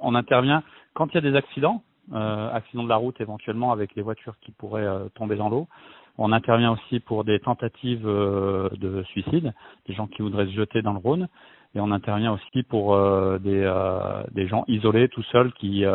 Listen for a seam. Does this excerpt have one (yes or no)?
no